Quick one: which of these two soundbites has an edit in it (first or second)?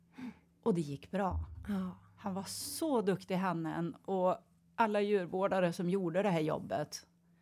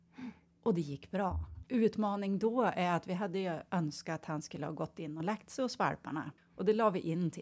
second